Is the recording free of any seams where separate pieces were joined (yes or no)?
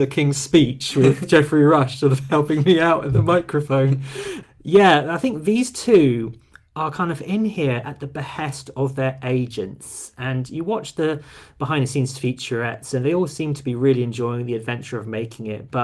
yes